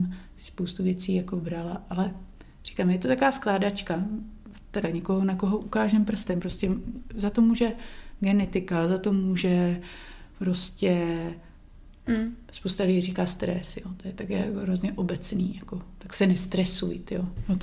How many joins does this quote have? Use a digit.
1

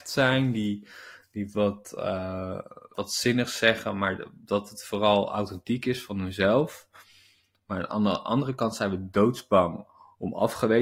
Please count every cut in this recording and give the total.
1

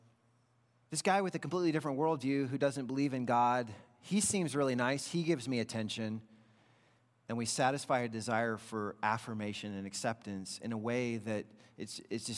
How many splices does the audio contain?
0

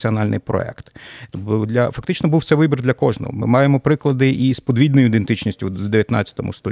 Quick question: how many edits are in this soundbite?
1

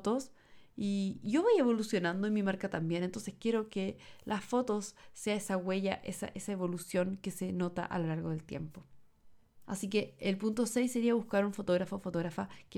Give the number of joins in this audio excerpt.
1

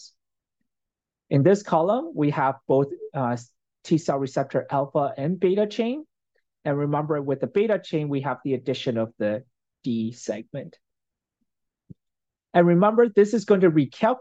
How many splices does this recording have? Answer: 1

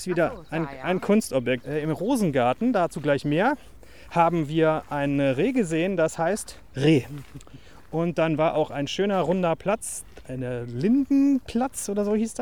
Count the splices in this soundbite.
1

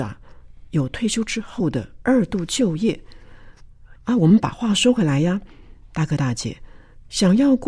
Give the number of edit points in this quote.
1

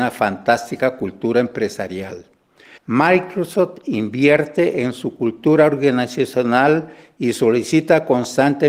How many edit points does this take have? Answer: 1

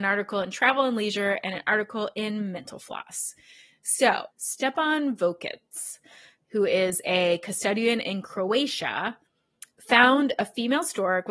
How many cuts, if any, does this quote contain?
0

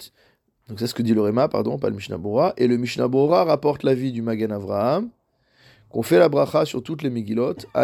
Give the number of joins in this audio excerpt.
0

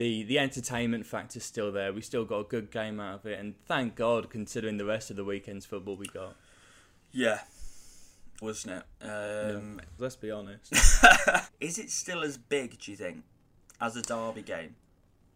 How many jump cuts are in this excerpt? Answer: 3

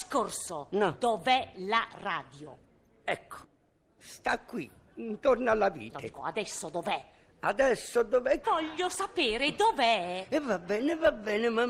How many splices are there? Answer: 2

